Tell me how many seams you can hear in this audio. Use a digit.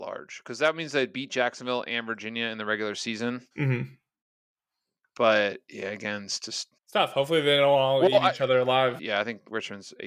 3